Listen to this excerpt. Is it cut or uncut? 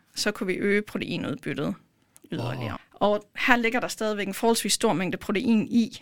cut